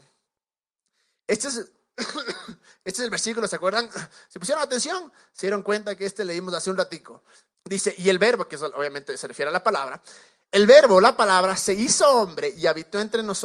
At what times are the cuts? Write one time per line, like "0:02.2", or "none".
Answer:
0:07.5